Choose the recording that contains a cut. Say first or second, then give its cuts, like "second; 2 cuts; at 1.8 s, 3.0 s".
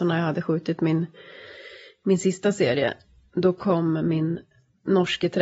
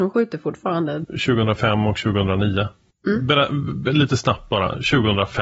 second; 1 cut; at 1.0 s